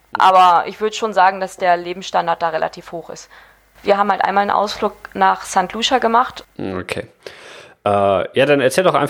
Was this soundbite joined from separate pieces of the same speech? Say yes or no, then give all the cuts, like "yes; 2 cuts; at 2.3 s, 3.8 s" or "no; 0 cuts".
yes; 2 cuts; at 3.8 s, 6.4 s